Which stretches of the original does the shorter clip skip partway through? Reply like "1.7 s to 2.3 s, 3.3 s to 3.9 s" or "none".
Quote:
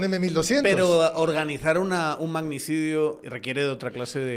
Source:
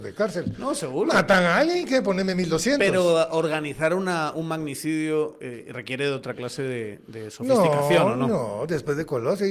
5.4 s to 5.7 s